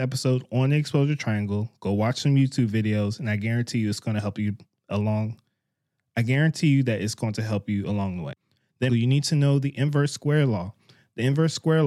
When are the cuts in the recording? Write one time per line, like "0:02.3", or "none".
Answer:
0:08.9